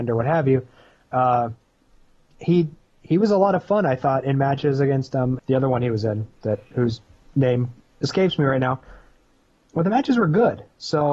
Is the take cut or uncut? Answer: cut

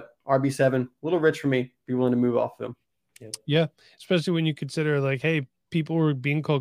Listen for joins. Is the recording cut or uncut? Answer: uncut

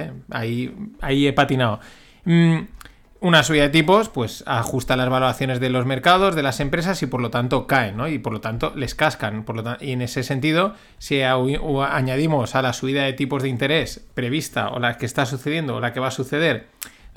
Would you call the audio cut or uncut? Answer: uncut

